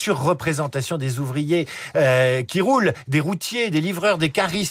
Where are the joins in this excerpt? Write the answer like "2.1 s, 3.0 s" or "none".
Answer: none